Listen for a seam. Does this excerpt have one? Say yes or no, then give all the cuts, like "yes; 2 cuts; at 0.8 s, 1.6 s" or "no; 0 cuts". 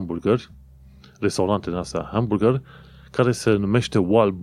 no; 0 cuts